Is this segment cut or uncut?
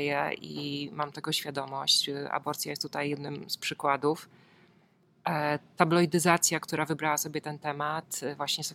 uncut